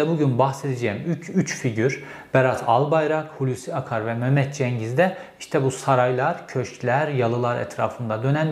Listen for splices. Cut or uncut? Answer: uncut